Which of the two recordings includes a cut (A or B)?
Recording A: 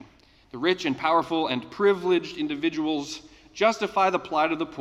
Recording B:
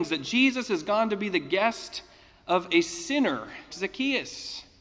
B